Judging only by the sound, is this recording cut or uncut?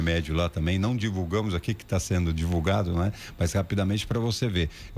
uncut